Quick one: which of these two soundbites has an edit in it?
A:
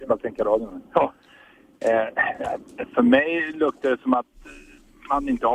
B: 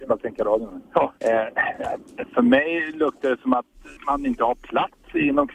B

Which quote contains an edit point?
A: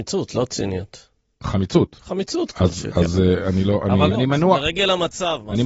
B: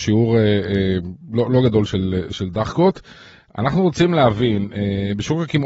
A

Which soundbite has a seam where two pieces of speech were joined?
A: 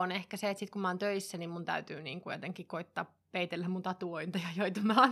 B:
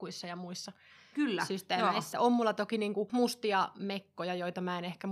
B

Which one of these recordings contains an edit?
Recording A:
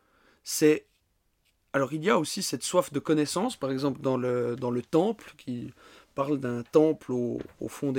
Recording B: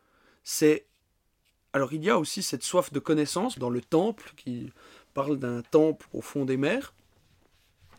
B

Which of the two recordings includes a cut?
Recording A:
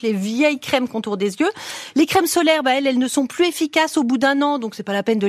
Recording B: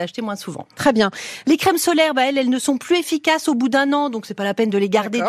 B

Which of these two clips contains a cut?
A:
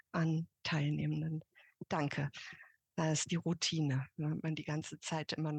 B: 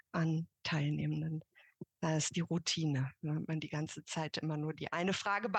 B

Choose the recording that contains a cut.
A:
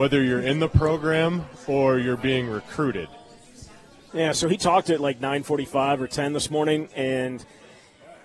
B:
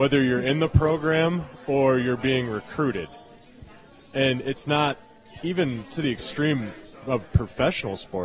A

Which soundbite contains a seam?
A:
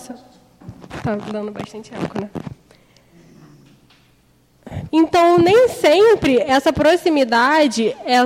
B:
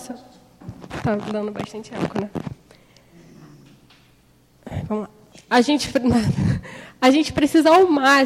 A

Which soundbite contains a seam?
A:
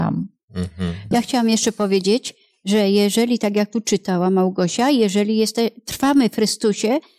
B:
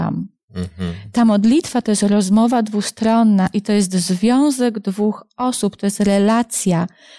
A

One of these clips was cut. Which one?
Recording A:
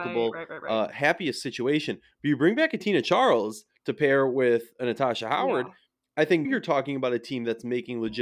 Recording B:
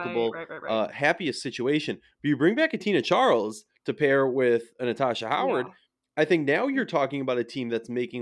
A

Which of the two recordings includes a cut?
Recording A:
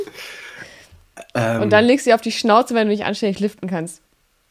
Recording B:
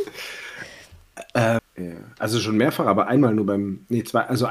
B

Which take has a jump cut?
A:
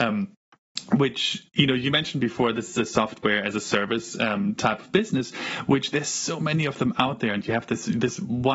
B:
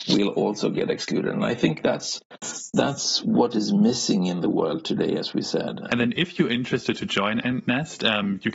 B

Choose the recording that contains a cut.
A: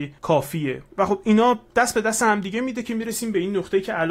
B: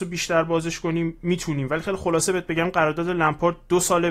A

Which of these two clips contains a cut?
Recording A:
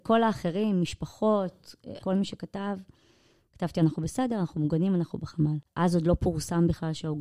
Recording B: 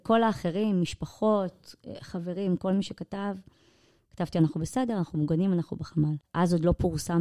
A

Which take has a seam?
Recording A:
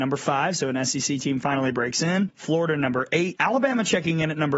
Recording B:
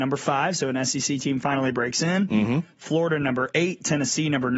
A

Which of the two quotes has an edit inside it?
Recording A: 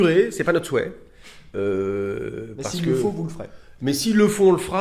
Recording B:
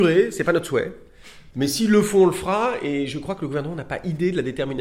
B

